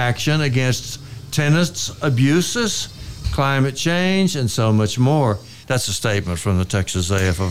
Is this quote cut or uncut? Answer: cut